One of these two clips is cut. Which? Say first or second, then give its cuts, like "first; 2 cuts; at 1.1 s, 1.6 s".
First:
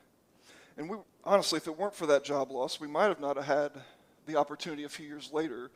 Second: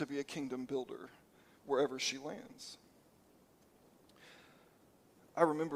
first; 1 cut; at 1.0 s